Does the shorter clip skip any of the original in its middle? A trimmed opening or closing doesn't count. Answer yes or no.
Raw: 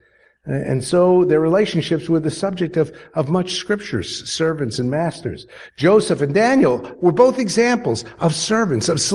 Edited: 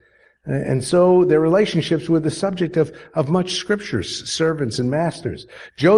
no